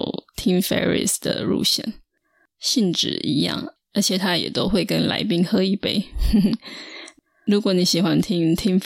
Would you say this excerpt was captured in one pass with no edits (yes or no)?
yes